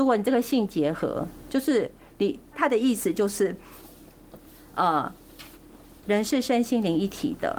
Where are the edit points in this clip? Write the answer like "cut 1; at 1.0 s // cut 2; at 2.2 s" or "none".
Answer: cut 1; at 2.5 s // cut 2; at 6.0 s